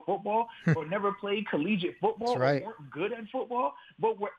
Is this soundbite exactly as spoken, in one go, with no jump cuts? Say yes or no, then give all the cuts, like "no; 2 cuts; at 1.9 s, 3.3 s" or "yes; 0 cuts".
yes; 0 cuts